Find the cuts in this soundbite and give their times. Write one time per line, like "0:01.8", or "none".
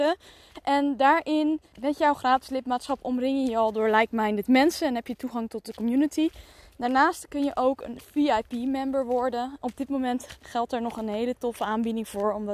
0:01.7